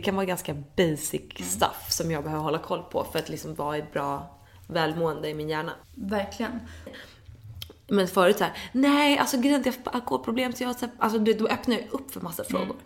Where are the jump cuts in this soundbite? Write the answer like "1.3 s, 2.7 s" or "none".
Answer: 5.8 s, 6.9 s, 11.0 s